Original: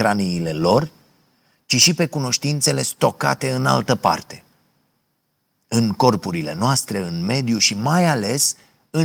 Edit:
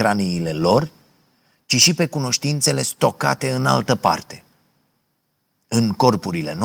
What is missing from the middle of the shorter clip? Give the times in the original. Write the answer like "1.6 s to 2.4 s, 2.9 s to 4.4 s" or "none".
none